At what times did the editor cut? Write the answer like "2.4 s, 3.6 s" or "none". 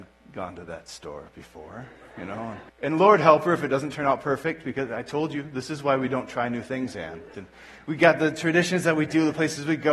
2.7 s, 7.3 s